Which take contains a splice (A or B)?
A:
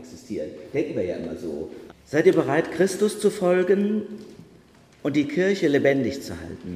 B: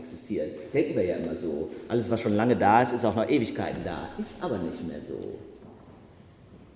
A